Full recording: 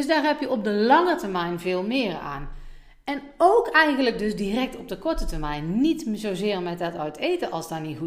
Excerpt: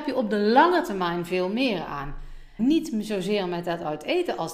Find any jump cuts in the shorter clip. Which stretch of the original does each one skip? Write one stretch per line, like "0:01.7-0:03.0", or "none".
0:02.9-0:05.7